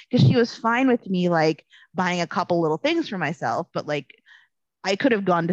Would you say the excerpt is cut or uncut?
uncut